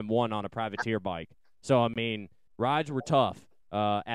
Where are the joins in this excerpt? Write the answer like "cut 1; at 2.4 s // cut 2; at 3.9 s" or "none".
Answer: cut 1; at 2.5 s